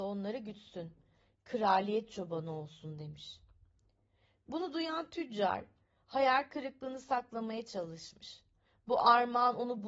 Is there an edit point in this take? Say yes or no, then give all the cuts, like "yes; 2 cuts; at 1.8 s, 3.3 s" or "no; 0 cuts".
no; 0 cuts